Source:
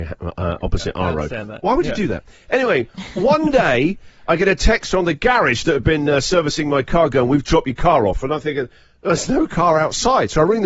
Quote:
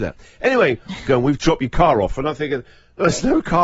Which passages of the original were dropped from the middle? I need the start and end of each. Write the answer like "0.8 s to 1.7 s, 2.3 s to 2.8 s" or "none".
3.1 s to 7.1 s